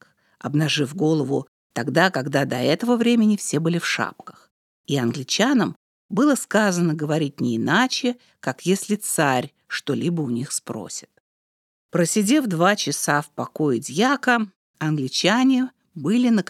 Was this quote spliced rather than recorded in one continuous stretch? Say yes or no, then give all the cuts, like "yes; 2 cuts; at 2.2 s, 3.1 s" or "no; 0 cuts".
no; 0 cuts